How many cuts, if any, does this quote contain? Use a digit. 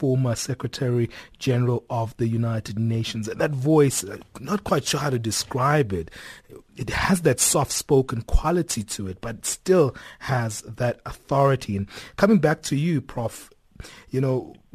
0